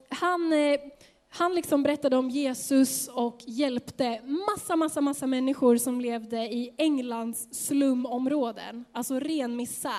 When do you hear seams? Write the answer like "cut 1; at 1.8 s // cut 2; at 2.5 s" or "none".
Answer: none